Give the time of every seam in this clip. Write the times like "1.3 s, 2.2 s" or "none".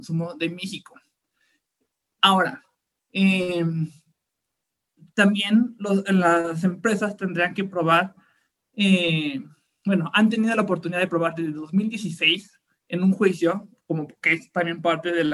none